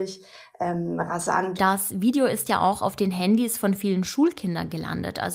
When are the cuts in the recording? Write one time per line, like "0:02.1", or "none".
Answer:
0:01.6